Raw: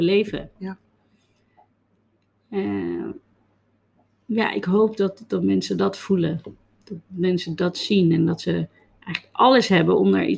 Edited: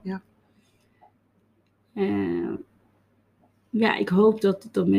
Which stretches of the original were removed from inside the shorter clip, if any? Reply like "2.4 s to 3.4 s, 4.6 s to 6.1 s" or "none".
none